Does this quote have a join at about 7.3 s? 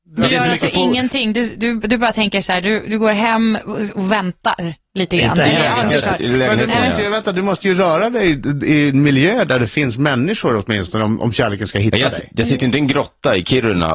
no; 0 cuts

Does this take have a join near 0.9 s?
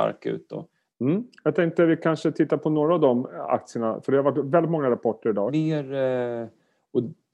yes; 2 cuts; at 0.9 s, 5.5 s

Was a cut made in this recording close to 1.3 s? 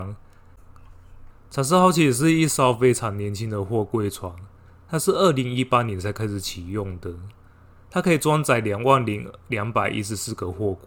yes; 1 cut; at 1.3 s

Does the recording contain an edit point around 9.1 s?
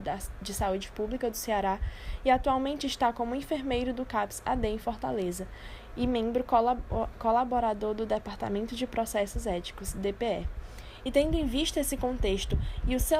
no; 1 cut; at 11.1 s

